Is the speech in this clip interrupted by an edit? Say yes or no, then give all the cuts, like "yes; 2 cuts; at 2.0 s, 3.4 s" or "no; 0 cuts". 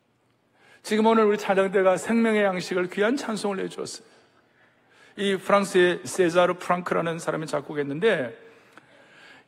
no; 0 cuts